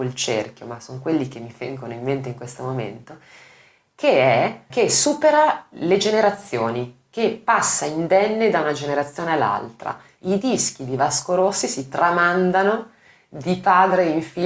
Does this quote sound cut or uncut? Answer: cut